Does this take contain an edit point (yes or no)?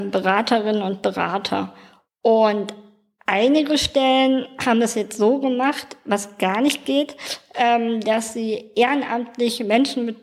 no